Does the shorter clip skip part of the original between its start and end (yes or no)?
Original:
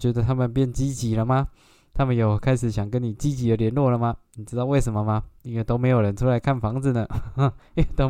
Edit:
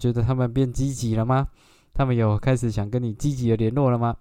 no